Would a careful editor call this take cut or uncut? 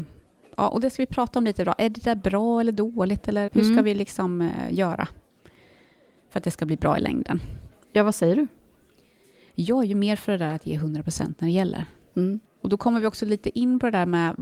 cut